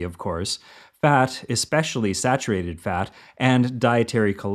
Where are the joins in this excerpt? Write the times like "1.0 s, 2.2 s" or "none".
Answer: none